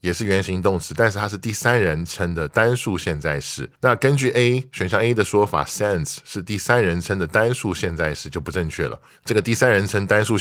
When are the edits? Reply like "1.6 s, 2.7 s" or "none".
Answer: 3.8 s